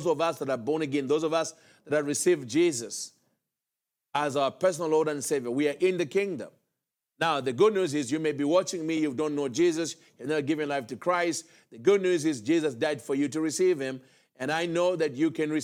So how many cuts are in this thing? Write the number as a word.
zero